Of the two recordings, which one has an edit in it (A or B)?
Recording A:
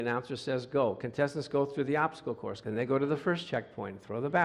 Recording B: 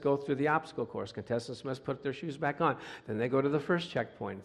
A